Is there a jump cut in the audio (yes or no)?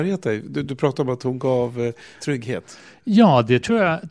yes